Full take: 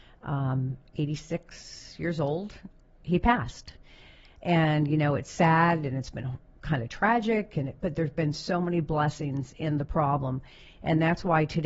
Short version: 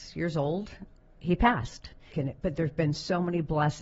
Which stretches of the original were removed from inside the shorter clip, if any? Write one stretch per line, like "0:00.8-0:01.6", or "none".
0:03.9-0:07.5